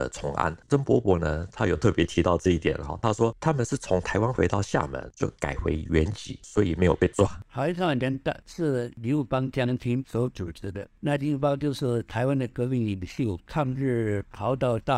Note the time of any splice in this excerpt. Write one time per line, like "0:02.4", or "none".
none